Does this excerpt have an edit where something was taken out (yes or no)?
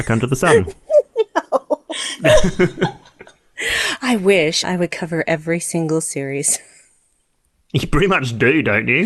yes